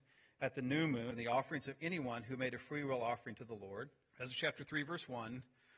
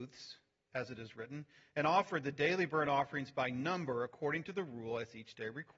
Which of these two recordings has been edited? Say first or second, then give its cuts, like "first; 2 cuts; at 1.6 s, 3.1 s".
first; 2 cuts; at 1.1 s, 4.1 s